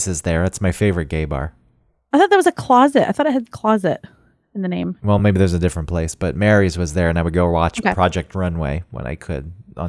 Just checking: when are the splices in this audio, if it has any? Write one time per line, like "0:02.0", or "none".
none